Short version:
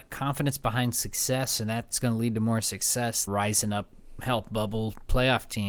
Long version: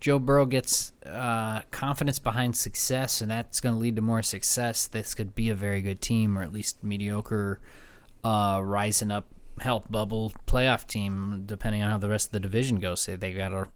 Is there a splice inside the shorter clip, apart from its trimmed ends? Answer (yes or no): yes